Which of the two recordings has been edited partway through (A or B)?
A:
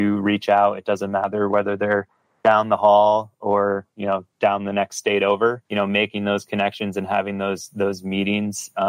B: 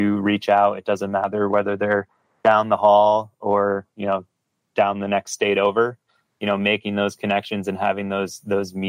A